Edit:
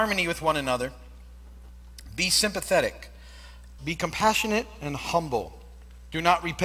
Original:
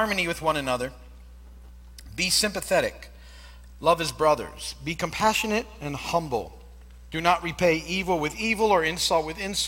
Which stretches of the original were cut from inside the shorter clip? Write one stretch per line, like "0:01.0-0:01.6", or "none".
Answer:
0:03.8-0:04.8